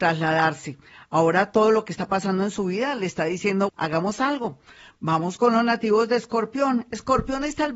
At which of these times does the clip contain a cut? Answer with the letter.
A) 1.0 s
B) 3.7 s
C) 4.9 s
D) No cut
B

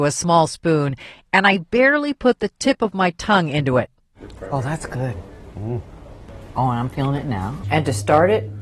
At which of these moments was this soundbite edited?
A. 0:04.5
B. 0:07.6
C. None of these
B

